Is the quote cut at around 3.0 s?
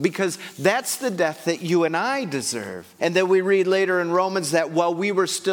yes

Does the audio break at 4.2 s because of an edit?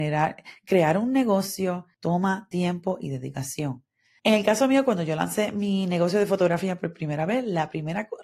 yes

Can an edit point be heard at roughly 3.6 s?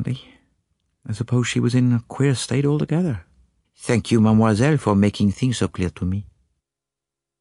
yes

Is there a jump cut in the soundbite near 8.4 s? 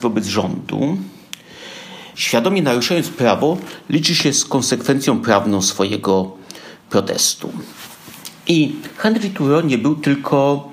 no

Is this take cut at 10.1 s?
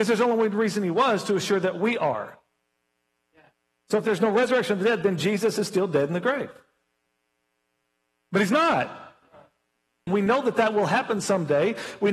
yes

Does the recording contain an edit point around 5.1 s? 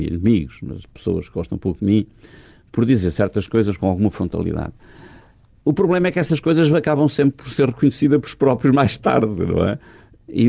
no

